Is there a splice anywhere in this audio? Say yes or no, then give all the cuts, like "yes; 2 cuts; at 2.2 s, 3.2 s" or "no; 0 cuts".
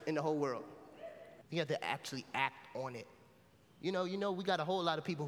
yes; 1 cut; at 1.4 s